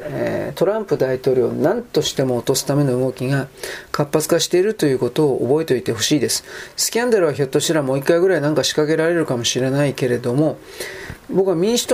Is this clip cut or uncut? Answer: uncut